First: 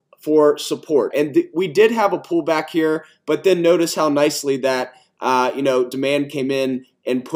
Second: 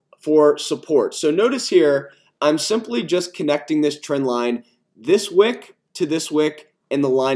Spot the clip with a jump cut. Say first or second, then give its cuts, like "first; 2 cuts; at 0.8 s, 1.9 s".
first; 1 cut; at 1.1 s